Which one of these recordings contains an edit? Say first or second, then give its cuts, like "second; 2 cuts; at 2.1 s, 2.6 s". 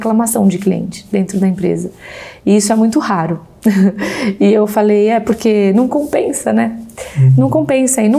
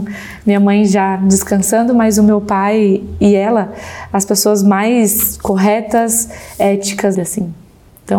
second; 1 cut; at 7.1 s